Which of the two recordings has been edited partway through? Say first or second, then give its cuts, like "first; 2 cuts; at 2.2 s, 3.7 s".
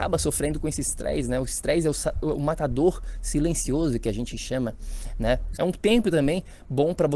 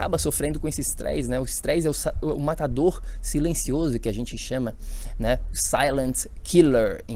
first; 1 cut; at 5.5 s